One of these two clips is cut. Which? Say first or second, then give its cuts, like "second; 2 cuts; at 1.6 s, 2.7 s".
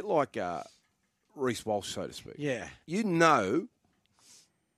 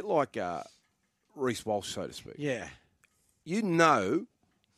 first; 1 cut; at 2.8 s